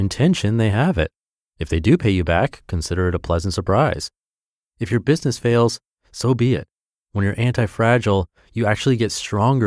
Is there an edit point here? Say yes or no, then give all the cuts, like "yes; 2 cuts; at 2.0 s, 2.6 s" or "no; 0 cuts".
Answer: no; 0 cuts